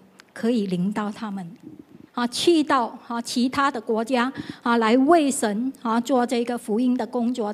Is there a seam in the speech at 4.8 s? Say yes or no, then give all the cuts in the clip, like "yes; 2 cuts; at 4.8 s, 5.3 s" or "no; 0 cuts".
no; 1 cut; at 2.1 s